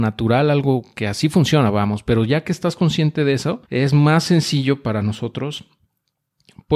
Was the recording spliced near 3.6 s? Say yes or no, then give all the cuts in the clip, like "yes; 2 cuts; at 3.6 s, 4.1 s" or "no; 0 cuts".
yes; 1 cut; at 3.6 s